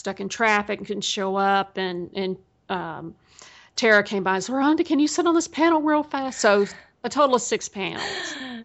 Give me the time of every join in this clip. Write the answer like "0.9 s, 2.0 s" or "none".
none